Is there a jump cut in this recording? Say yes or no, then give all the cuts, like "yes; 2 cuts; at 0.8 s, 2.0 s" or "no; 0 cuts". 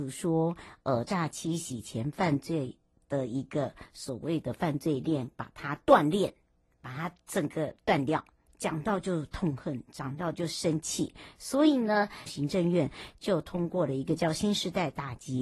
yes; 2 cuts; at 8.5 s, 12.3 s